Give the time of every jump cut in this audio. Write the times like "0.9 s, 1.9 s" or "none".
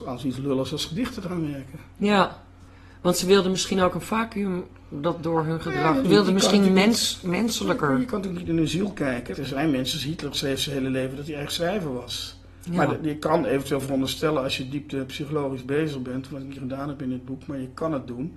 6.0 s, 9.3 s